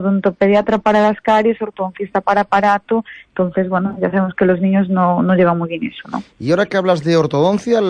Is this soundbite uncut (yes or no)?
yes